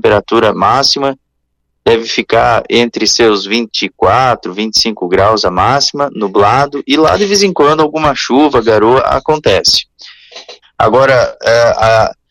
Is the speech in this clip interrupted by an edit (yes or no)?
yes